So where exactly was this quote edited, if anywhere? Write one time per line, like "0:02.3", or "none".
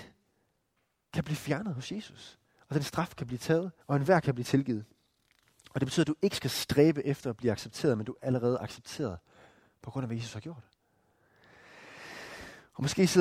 0:03.8
0:08.2